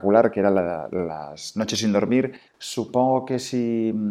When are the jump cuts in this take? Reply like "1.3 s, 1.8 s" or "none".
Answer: 2.5 s